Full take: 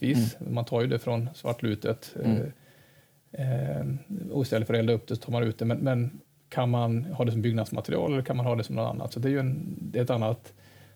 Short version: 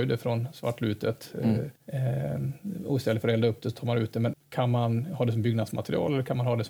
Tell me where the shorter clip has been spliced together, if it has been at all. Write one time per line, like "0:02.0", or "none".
0:01.8
0:04.3